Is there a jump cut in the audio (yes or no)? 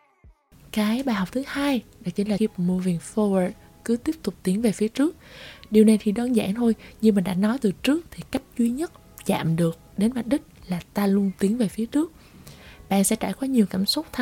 yes